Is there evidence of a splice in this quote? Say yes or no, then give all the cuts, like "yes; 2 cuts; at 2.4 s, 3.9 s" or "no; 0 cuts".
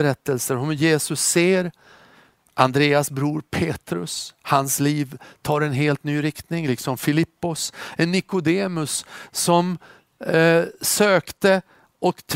yes; 1 cut; at 8.0 s